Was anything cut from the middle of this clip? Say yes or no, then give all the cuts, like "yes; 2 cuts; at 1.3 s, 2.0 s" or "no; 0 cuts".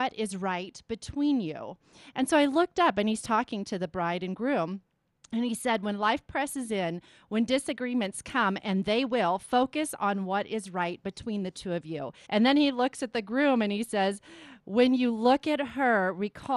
yes; 1 cut; at 12.2 s